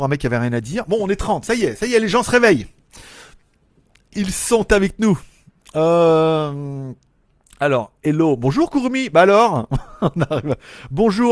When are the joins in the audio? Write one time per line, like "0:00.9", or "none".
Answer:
none